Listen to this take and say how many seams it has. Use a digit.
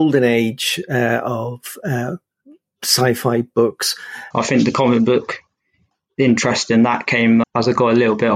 2